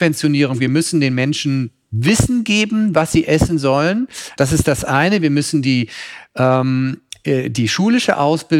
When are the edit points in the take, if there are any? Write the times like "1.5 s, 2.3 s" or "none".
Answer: none